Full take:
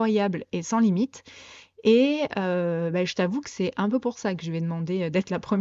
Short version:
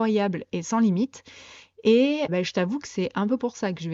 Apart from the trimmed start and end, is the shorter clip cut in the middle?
yes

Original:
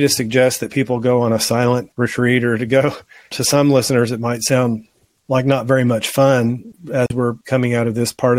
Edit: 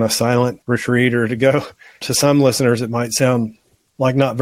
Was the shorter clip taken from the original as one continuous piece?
yes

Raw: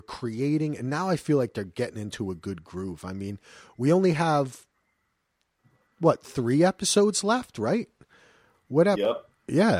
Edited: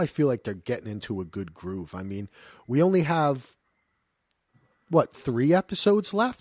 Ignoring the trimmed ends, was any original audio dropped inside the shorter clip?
no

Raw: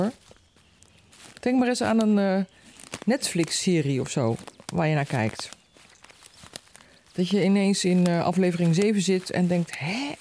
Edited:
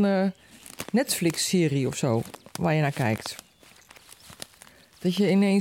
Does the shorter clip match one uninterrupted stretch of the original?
yes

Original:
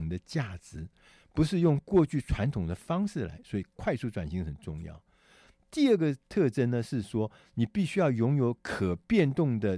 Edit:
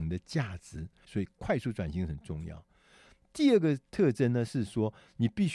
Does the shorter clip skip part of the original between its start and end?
yes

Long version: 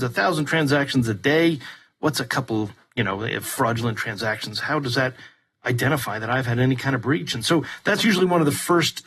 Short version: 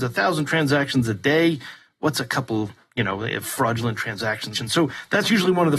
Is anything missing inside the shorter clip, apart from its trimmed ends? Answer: yes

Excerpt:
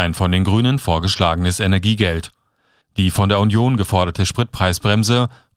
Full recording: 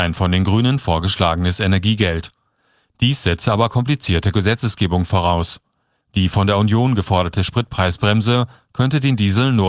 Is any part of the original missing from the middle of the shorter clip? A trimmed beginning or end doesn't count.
yes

